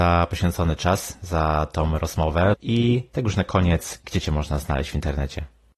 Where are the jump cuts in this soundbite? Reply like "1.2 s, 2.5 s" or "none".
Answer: 2.5 s, 4.0 s